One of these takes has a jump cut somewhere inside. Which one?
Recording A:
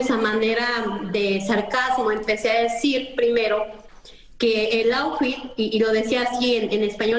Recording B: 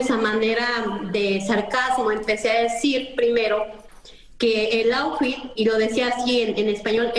B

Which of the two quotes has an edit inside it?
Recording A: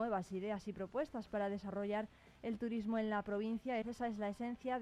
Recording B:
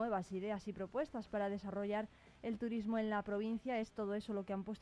A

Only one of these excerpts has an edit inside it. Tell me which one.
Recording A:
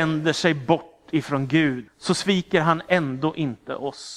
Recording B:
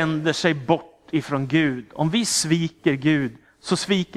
A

